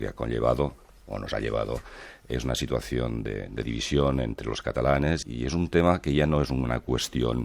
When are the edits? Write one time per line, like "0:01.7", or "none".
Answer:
0:05.2